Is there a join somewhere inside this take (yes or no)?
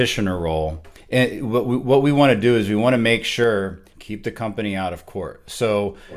yes